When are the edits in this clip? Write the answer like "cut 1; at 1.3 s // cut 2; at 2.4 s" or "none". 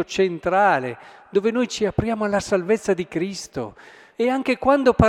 cut 1; at 4.1 s